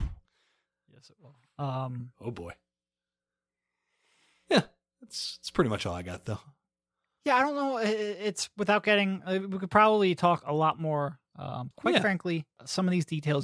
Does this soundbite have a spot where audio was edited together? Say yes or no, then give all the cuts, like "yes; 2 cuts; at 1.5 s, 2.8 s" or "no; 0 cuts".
yes; 1 cut; at 11.7 s